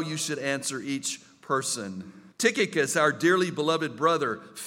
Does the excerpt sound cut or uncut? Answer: cut